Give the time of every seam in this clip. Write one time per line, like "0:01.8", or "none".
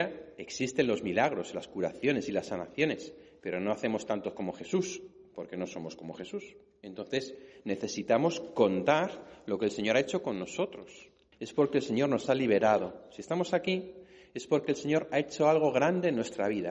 0:11.3